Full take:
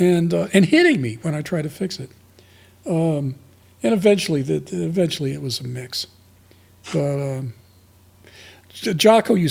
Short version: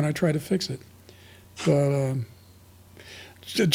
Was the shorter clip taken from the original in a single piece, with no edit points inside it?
no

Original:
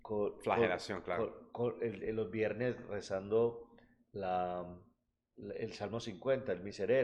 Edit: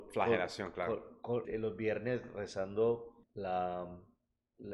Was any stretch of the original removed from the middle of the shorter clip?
yes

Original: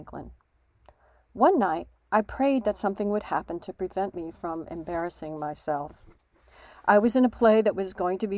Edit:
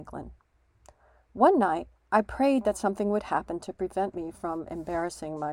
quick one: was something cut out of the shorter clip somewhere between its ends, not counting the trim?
no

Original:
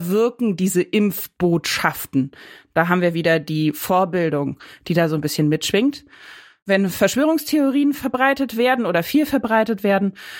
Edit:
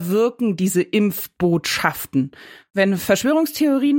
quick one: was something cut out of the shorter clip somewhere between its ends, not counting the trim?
yes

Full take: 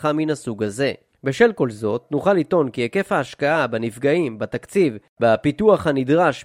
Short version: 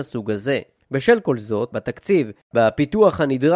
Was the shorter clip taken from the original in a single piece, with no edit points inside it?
no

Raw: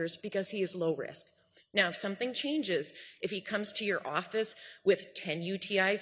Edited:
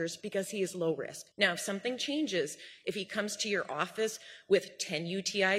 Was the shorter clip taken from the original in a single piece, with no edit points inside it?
no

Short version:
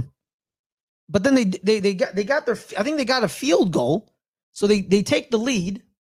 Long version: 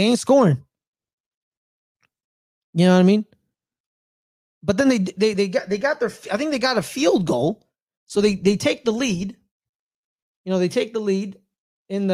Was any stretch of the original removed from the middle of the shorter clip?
yes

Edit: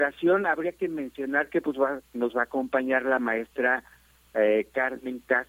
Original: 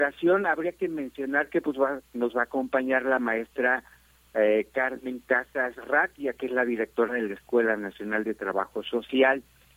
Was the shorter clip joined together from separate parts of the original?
no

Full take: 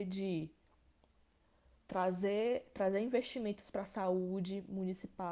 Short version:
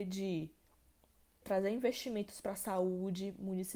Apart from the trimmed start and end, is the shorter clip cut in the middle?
yes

